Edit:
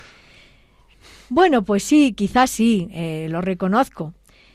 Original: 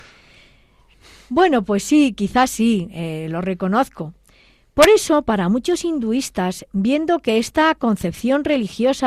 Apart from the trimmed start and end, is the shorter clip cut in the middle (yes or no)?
no